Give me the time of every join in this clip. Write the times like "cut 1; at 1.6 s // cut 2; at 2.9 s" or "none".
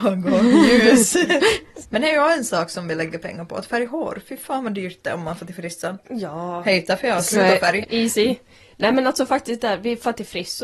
cut 1; at 1.8 s // cut 2; at 7.8 s